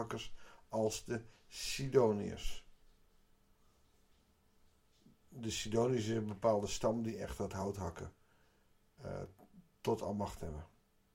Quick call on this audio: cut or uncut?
uncut